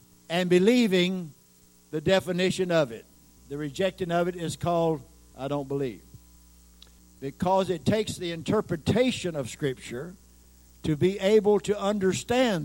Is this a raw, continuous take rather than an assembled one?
no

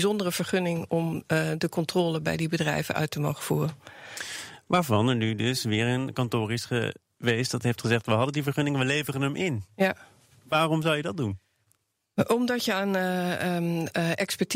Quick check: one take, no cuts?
yes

